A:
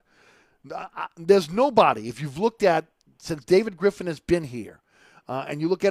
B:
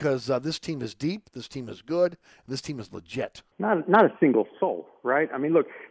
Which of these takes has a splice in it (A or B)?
B